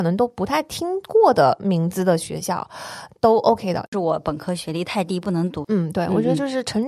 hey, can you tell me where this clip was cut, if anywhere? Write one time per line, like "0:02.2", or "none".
0:03.9
0:05.6